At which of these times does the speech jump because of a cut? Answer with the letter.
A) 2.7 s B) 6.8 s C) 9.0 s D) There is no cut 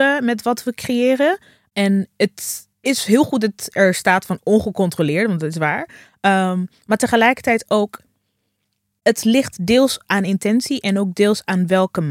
A